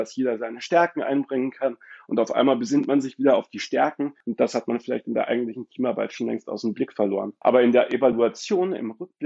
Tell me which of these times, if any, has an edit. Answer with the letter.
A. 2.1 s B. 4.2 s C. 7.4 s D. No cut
D